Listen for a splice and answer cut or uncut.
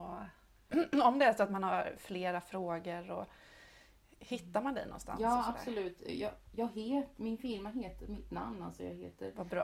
uncut